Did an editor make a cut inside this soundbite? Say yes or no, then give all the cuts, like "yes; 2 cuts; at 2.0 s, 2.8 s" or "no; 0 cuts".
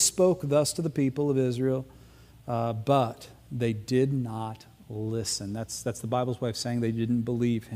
no; 0 cuts